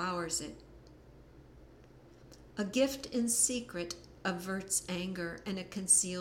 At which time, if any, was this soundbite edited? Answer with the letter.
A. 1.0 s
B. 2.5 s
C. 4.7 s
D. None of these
B